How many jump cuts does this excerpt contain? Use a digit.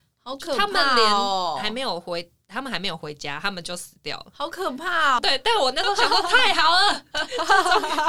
1